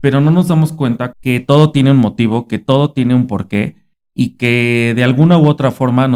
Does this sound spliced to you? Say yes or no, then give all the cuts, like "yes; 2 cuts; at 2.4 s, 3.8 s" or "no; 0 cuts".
yes; 1 cut; at 1.1 s